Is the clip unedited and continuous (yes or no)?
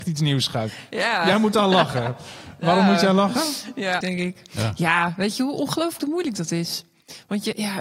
no